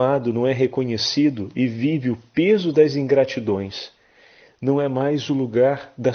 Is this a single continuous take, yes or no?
yes